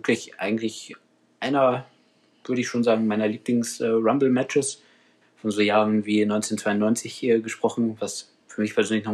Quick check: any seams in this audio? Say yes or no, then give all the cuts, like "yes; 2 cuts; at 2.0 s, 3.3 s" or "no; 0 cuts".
yes; 1 cut; at 5.2 s